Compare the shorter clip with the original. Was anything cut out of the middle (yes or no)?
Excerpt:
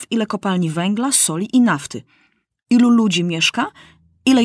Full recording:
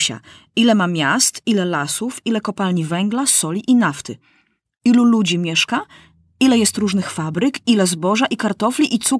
no